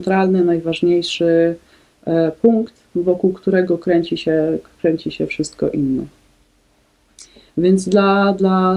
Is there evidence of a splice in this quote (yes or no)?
yes